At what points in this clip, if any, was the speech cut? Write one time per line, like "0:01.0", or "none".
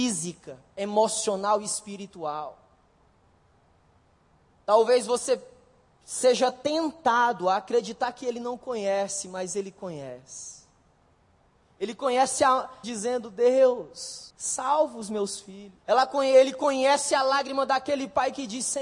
0:12.8
0:14.3
0:15.8